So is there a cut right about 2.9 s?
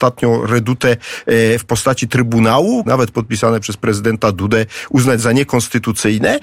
yes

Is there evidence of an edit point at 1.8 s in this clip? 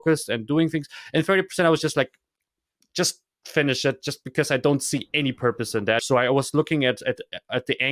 no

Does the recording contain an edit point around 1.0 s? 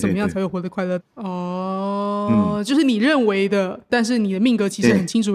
yes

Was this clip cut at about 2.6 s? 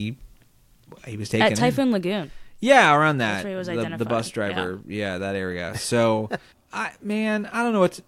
no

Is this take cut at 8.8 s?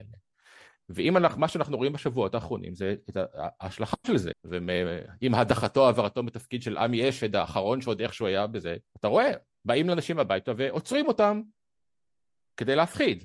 yes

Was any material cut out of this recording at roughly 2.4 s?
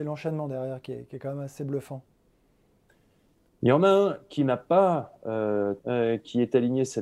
no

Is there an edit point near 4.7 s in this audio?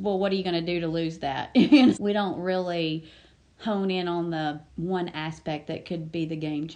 yes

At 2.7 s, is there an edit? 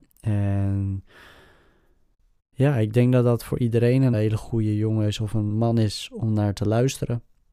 no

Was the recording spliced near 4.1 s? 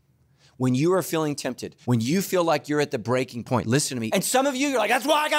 yes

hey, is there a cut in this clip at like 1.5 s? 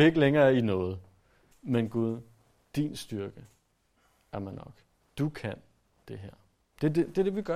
yes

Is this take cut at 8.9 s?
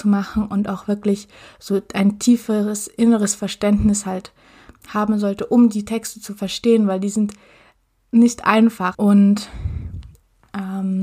yes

